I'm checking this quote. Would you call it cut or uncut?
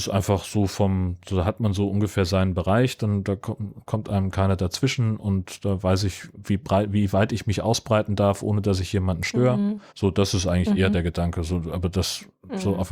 cut